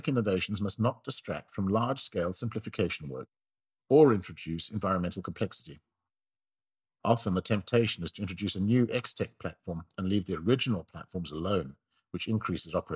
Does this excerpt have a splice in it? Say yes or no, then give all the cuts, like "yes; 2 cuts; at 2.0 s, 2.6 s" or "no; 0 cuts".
no; 0 cuts